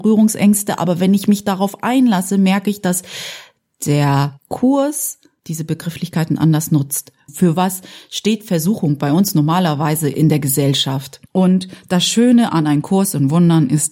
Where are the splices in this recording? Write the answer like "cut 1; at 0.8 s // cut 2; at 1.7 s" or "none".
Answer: cut 1; at 7.3 s // cut 2; at 11.3 s

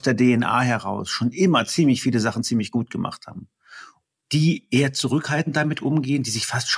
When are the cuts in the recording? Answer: none

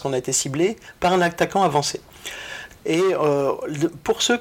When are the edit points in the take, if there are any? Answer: cut 1; at 2.8 s

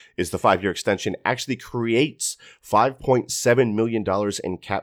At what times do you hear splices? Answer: none

